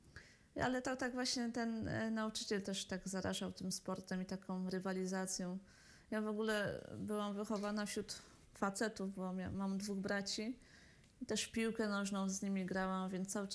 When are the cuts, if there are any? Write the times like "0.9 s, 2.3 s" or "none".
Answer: 8.4 s